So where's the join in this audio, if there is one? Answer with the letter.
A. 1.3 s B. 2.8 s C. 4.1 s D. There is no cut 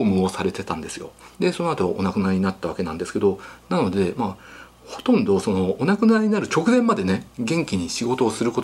A